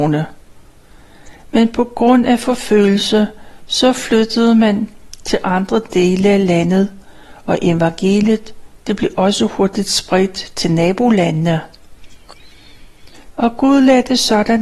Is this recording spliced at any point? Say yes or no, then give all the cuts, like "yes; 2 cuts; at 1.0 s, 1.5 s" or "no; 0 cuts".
yes; 1 cut; at 13.3 s